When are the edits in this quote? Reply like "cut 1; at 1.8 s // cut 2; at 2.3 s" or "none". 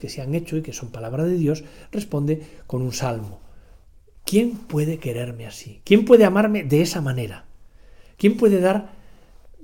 cut 1; at 4.2 s